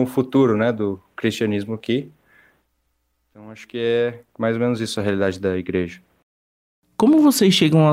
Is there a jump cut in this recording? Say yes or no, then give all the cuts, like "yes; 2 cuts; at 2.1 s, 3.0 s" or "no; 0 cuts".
no; 0 cuts